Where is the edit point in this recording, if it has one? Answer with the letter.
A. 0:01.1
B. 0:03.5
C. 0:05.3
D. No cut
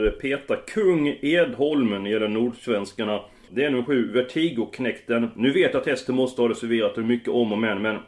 B